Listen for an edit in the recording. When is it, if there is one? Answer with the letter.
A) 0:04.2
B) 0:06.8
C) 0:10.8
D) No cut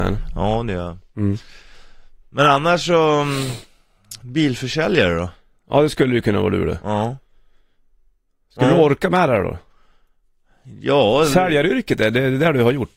A